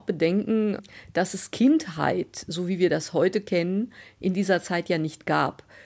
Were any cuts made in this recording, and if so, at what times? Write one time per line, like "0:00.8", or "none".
none